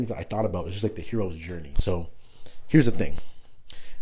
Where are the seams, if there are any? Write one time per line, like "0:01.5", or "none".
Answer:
0:01.7